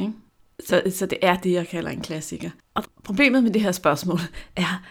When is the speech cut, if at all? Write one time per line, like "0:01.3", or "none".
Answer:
0:02.8